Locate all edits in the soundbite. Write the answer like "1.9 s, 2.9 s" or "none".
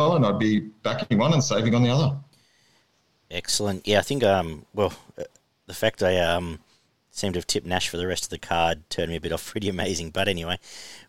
none